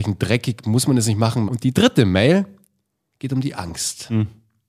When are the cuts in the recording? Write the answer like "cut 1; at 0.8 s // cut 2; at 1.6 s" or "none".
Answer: cut 1; at 1.5 s